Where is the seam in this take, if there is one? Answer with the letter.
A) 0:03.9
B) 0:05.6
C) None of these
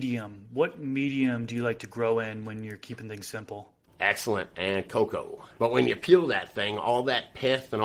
B